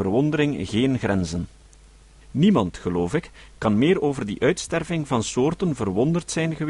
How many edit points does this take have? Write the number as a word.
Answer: one